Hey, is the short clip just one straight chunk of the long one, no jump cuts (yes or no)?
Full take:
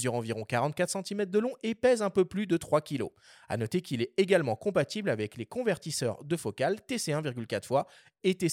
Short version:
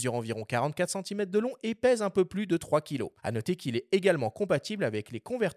no